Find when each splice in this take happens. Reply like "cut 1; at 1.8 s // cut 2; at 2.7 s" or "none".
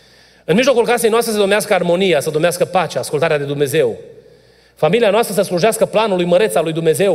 none